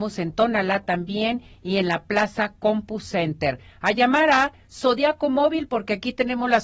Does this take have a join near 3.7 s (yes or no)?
no